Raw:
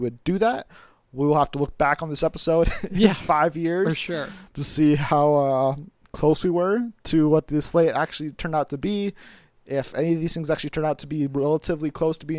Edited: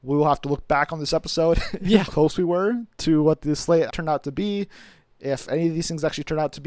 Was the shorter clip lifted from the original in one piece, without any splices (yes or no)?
no